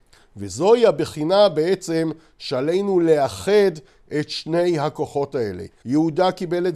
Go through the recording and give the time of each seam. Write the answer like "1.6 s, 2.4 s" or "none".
5.8 s